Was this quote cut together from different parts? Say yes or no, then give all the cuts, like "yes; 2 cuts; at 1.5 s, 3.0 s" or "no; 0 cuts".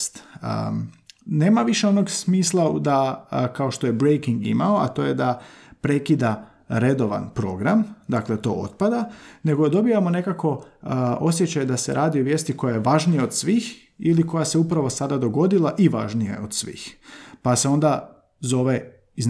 no; 0 cuts